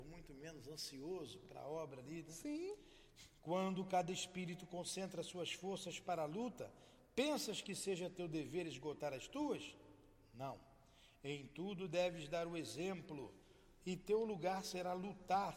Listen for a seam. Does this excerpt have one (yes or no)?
no